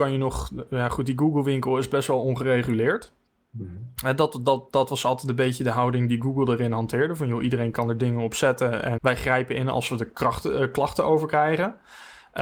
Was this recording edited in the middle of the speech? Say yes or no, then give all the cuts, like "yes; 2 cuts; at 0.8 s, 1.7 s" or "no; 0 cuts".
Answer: yes; 1 cut; at 9.0 s